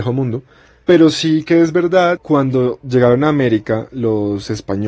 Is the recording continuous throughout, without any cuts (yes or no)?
yes